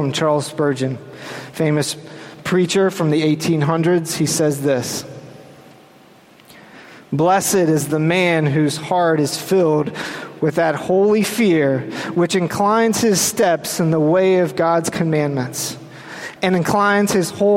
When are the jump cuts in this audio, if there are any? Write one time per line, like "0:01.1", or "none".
0:16.4